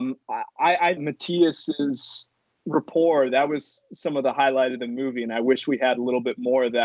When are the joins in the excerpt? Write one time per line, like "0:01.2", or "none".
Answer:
0:01.0